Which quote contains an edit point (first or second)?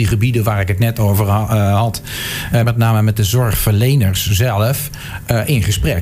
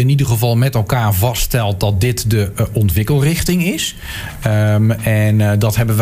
first